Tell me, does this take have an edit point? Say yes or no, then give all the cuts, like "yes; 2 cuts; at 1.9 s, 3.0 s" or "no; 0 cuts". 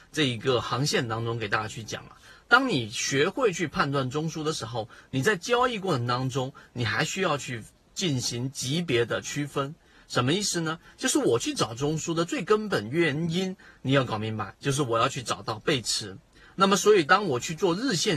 no; 0 cuts